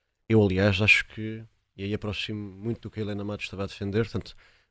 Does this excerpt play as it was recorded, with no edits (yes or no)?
yes